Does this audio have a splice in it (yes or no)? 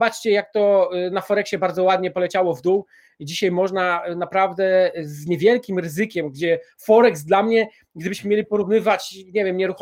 no